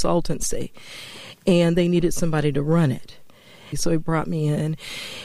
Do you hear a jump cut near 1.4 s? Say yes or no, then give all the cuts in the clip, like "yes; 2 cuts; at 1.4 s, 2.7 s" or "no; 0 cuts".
no; 1 cut; at 3.7 s